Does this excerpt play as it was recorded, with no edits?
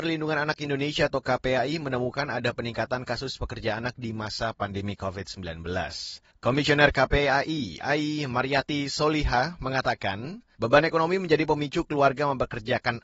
yes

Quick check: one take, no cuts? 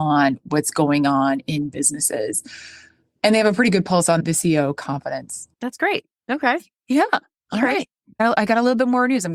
yes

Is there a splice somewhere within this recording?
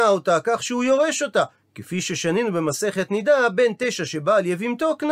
no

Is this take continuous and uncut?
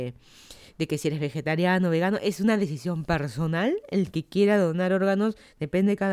yes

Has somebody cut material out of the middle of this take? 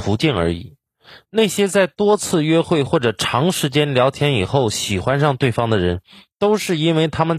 no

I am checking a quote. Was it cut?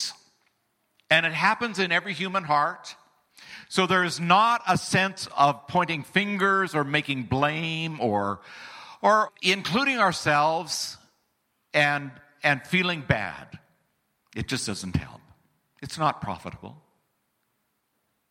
yes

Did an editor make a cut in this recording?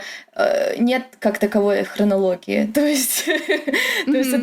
no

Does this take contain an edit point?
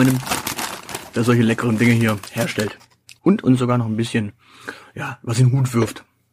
yes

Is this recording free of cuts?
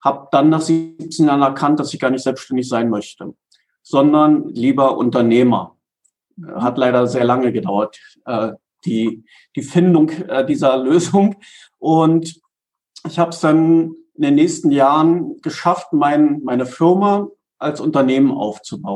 yes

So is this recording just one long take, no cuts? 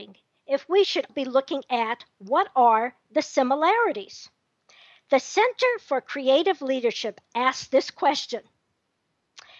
no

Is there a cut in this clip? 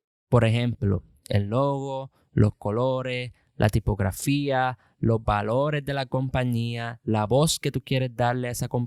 no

